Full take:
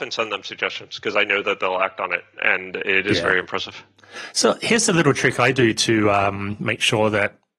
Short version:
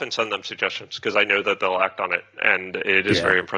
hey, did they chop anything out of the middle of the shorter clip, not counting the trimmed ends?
no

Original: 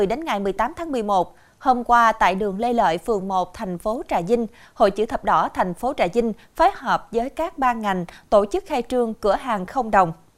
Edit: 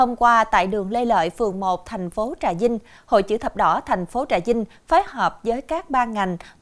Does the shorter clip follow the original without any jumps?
yes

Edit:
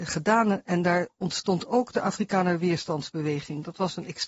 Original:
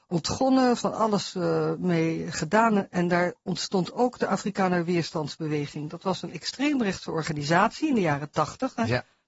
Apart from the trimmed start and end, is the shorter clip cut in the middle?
no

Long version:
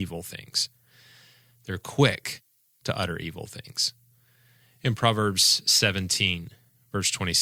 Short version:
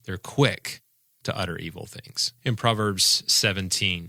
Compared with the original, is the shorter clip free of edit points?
no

